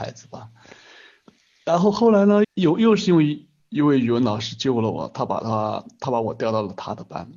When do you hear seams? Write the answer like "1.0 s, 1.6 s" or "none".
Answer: 2.4 s